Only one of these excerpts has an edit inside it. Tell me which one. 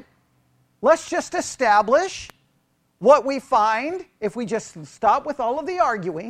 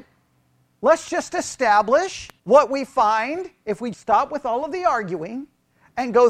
second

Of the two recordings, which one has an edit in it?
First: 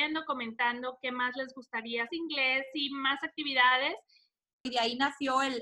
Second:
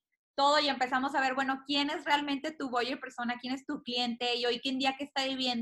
first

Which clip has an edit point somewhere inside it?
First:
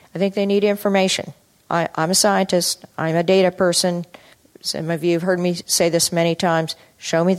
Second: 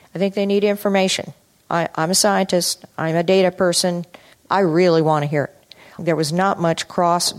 second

